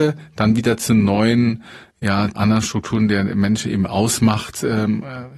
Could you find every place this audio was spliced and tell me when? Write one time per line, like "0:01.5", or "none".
0:02.3